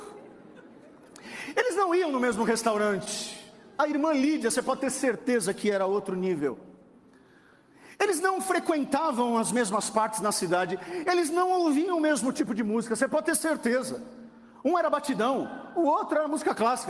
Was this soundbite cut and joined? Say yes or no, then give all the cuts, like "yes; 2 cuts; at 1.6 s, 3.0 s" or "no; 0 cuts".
no; 0 cuts